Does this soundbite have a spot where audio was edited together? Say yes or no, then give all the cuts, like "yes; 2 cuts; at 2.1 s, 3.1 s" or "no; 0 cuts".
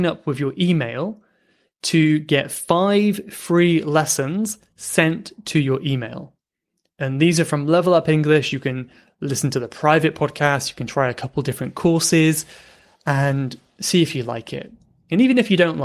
no; 0 cuts